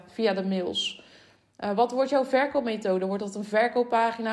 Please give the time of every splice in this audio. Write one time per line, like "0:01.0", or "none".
none